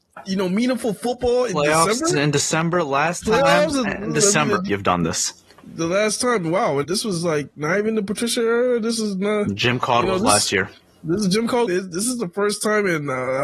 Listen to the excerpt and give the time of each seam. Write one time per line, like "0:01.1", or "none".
0:04.7
0:06.8
0:11.7